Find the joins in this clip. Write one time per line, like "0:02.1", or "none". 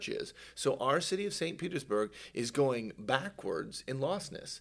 0:01.6